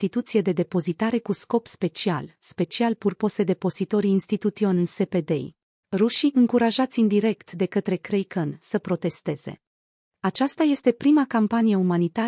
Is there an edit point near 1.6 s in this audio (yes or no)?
no